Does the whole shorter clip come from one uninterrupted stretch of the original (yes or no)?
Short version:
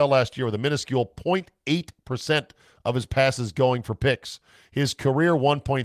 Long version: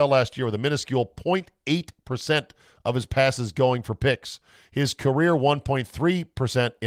yes